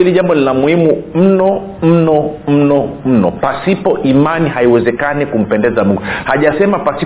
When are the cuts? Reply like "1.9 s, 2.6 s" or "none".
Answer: none